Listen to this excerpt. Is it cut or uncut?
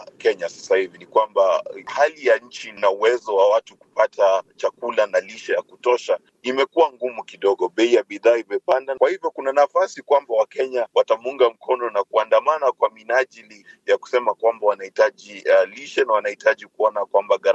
uncut